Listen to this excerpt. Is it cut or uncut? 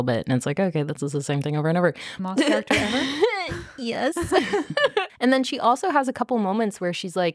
cut